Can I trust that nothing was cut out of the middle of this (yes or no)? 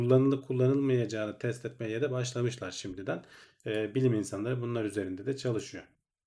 no